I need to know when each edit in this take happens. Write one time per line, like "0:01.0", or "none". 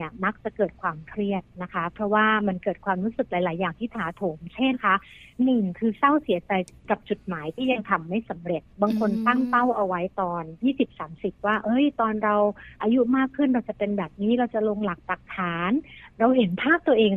0:04.7
0:10.6

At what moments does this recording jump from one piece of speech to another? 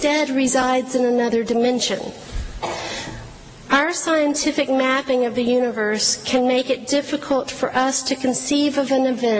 0:03.6

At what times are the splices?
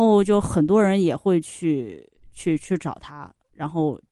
none

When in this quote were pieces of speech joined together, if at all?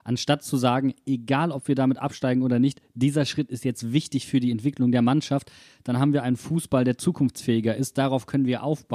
none

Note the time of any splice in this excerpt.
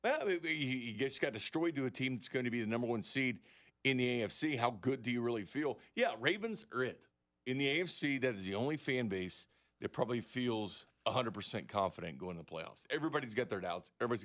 none

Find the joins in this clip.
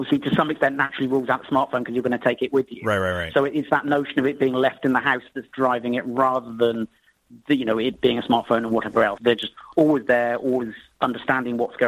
0:09.2
0:10.9

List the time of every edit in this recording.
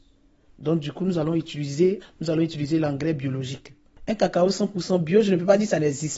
0:02.0

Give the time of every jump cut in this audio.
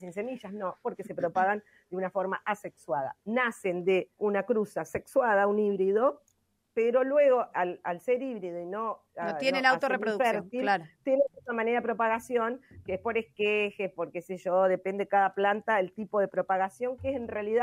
0:04.2

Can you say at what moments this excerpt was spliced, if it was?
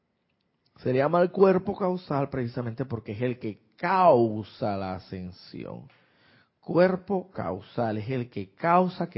none

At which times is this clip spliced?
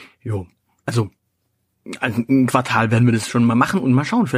none

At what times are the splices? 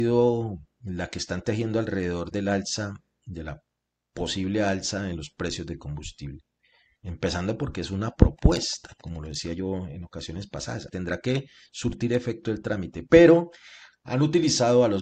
0:07.0
0:10.9

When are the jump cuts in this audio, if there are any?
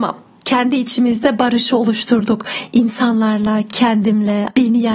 none

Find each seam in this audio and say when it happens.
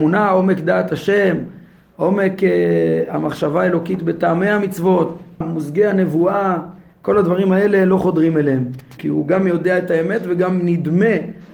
0:05.4
0:09.0

